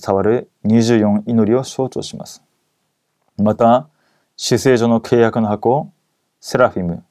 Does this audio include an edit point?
no; 0 cuts

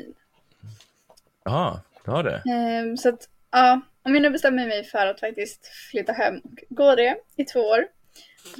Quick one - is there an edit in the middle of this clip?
no; 0 cuts

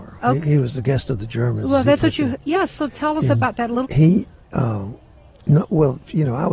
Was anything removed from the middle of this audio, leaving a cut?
yes; 1 cut; at 3.8 s

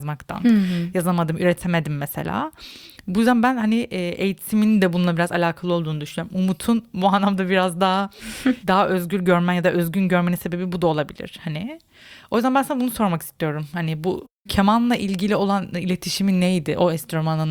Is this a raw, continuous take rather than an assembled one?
yes; 0 cuts

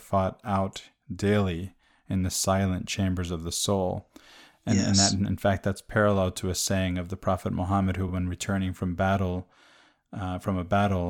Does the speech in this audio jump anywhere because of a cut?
no; 0 cuts

